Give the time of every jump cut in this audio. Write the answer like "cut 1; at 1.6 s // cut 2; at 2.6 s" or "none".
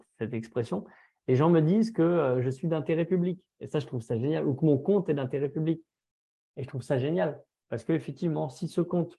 none